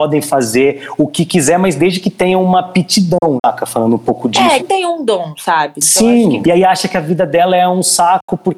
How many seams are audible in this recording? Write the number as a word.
three